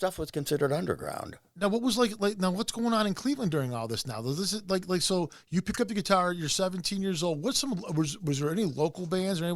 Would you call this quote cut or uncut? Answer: uncut